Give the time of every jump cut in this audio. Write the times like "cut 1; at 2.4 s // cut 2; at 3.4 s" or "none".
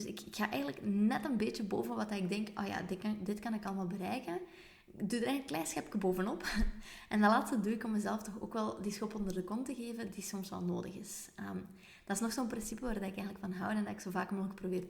none